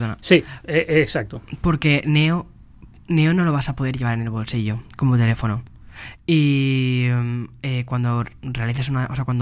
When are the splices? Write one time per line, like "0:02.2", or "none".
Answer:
0:06.2